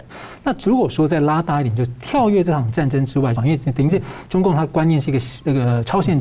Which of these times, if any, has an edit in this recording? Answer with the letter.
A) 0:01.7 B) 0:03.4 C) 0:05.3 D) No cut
B